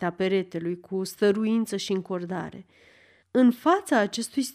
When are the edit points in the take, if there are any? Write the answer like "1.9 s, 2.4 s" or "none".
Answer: 3.2 s